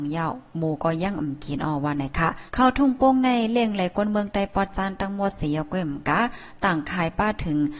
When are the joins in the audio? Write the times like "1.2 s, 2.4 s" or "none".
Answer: 2.5 s